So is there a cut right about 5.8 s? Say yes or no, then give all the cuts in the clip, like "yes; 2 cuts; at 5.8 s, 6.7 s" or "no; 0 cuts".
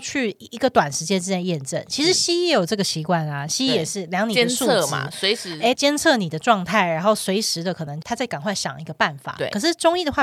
yes; 2 cuts; at 5.8 s, 8.0 s